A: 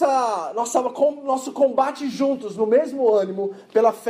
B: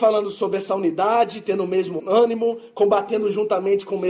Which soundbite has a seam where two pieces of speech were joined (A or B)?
B